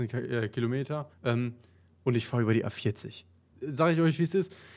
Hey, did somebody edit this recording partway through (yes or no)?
yes